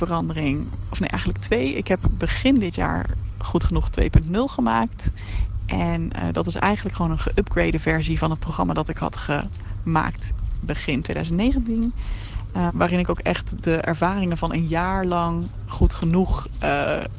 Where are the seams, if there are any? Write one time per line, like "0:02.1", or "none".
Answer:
0:12.7